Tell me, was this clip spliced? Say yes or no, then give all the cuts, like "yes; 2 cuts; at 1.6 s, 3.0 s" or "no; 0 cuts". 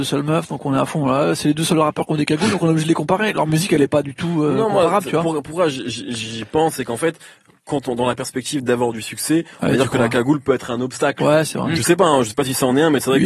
no; 0 cuts